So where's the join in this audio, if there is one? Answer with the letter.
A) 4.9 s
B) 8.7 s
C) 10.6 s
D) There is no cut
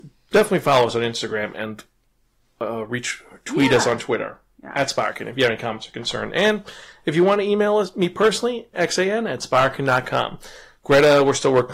B